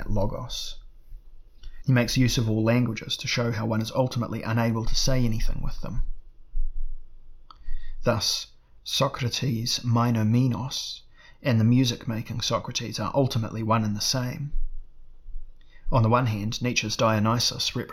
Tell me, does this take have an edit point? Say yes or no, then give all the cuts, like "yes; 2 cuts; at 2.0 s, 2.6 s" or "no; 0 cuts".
yes; 1 cut; at 1.8 s